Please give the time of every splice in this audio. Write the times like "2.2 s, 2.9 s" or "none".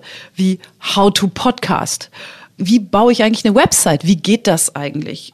none